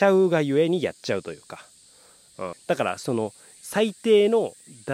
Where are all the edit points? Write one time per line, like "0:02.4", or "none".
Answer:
0:02.5